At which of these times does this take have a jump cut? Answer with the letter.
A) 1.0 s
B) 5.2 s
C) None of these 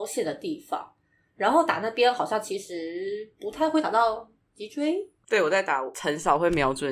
B